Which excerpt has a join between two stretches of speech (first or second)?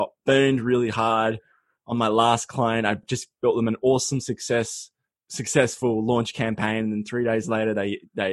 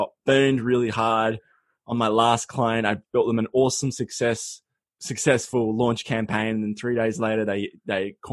second